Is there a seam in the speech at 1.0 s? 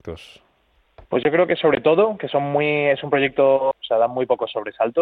yes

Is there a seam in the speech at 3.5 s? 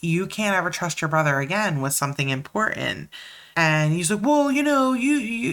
yes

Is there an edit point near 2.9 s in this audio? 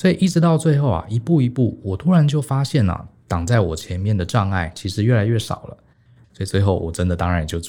no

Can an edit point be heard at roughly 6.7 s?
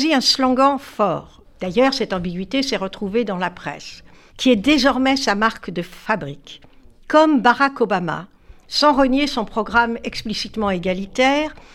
no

